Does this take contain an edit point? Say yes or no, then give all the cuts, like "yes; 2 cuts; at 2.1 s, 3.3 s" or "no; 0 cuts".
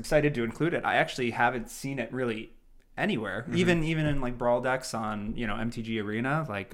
no; 0 cuts